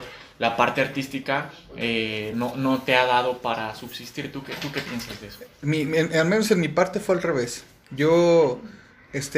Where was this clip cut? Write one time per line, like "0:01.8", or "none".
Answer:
none

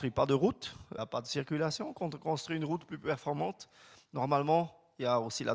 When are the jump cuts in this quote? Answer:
0:01.0

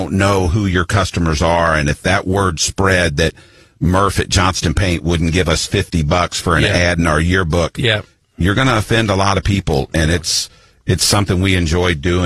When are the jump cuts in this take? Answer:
none

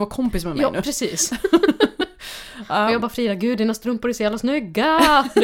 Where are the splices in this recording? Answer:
none

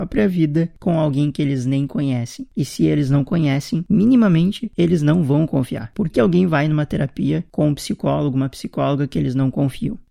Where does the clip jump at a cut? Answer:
0:06.1

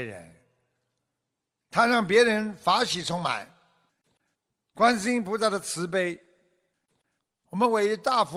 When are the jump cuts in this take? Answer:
none

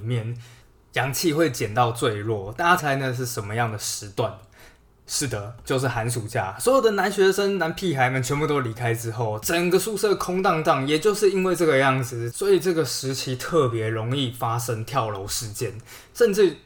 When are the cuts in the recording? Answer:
0:02.8

